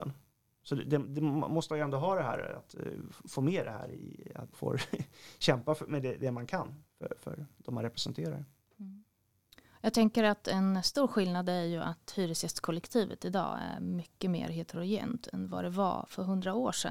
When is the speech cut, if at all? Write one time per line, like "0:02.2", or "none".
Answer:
0:02.7
0:04.5